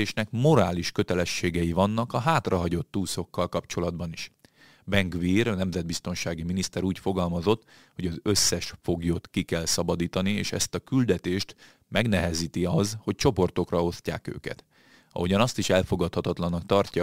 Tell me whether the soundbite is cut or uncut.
uncut